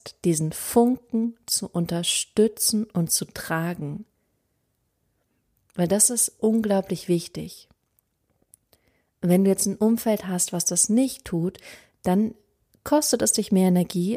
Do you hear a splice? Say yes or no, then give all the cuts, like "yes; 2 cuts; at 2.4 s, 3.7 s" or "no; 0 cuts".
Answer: no; 0 cuts